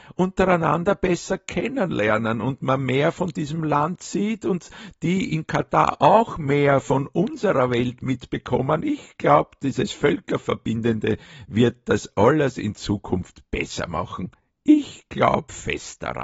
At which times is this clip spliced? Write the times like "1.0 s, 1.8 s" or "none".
none